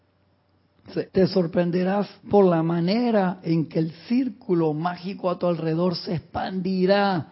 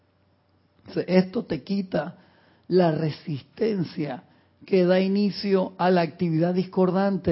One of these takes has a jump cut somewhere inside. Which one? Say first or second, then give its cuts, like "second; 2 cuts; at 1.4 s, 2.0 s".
first; 2 cuts; at 1.1 s, 2.2 s